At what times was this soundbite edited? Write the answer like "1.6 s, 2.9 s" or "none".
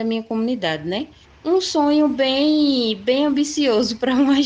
1.2 s